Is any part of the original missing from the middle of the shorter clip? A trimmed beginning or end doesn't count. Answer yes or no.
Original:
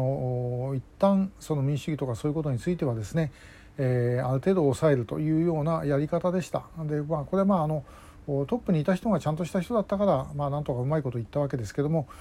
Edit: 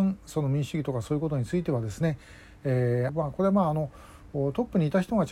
yes